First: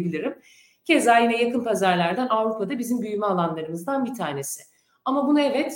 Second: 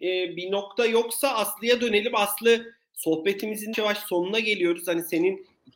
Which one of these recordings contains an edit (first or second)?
second